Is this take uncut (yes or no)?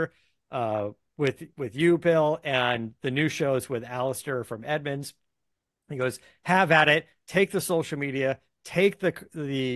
yes